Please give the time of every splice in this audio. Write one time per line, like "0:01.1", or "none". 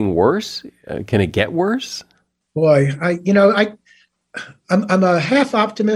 none